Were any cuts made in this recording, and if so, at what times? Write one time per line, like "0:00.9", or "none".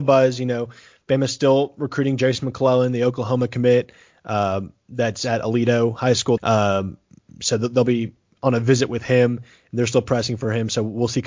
0:06.4